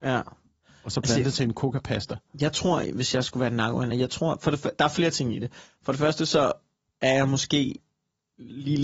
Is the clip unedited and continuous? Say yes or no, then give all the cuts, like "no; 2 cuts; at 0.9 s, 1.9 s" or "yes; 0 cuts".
yes; 0 cuts